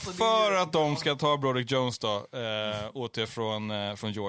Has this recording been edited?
no; 0 cuts

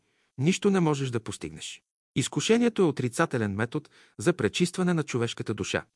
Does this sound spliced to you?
yes; 1 cut; at 2.0 s

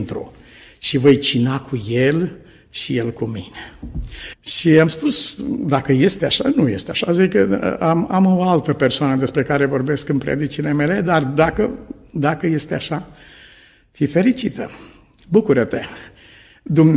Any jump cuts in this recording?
yes; 1 cut; at 4.3 s

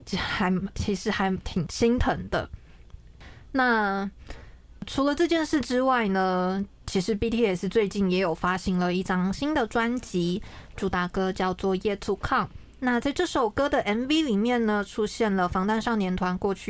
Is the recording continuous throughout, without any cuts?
yes; 0 cuts

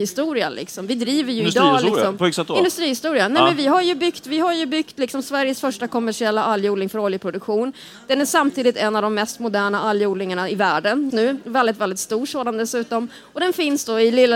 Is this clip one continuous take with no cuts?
no; 1 cut; at 11.1 s

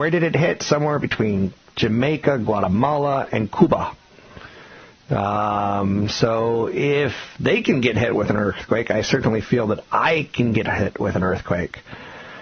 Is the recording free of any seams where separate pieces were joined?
yes; 0 cuts

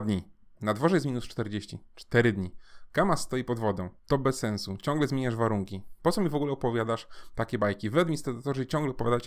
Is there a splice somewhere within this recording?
yes; 1 cut; at 4.0 s

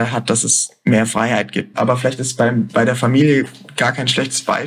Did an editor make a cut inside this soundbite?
yes; 1 cut; at 1.7 s

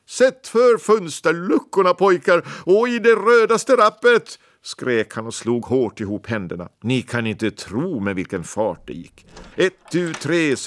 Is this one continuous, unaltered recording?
no; 2 cuts; at 6.7 s, 9.5 s

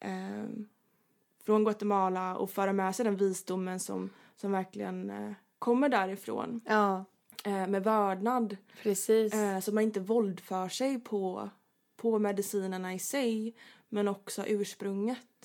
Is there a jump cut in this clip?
no; 0 cuts

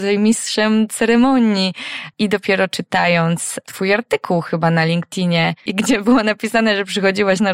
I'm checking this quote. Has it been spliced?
yes; 2 cuts; at 2.1 s, 5.7 s

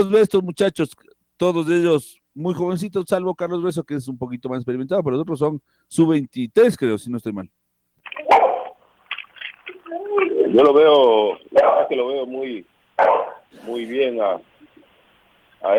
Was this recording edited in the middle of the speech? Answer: no; 0 cuts

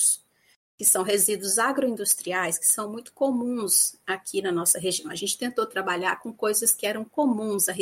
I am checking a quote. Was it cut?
no; 0 cuts

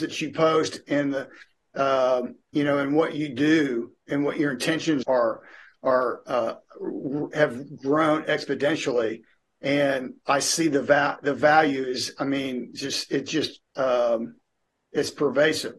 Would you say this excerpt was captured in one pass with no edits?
no; 2 cuts; at 5.0 s, 13.7 s

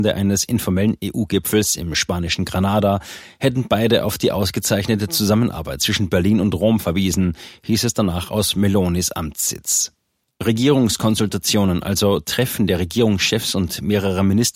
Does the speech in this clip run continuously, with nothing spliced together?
yes; 0 cuts

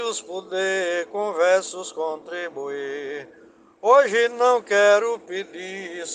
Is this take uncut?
yes; 0 cuts

